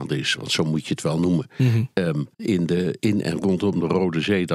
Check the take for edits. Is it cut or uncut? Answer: cut